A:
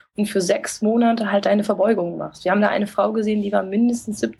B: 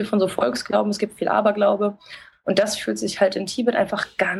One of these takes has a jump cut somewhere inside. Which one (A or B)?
B